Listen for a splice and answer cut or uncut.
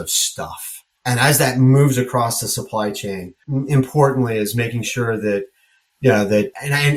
uncut